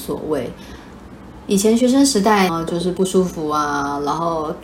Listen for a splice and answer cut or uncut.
cut